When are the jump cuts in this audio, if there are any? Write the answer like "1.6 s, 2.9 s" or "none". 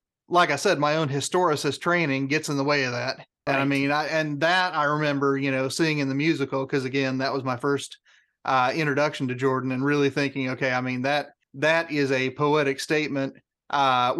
3.5 s, 11.4 s